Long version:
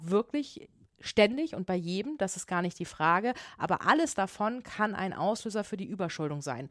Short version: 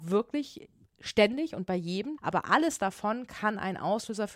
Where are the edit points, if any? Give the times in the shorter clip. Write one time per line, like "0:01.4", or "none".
0:02.2